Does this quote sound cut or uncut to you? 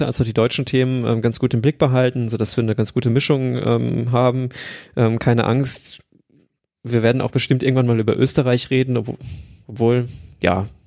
uncut